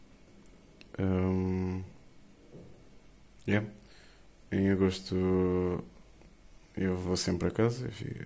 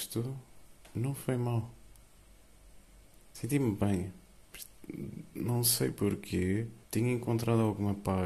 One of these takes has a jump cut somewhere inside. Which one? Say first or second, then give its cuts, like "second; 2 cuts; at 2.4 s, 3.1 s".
second; 1 cut; at 6.8 s